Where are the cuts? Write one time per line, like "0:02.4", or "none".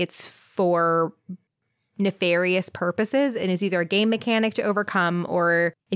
none